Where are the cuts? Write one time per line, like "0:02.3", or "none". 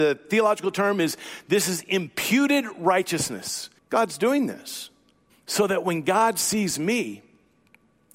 0:03.8
0:05.3